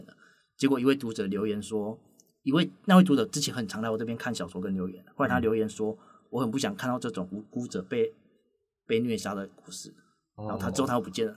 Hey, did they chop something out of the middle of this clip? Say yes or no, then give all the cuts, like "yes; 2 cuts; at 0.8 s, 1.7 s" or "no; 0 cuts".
no; 0 cuts